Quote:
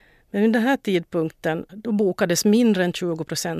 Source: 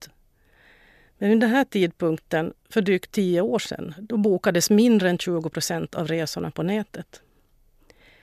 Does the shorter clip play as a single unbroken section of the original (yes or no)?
no